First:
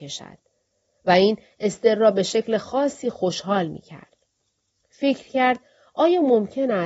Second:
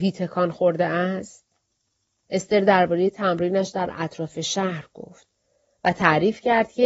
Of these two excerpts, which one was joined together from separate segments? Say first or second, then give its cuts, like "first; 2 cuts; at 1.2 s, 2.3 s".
second; 1 cut; at 2.2 s